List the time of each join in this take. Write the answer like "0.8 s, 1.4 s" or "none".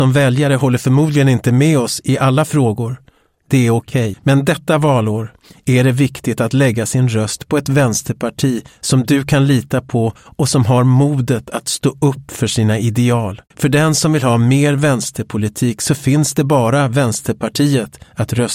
4.1 s, 13.5 s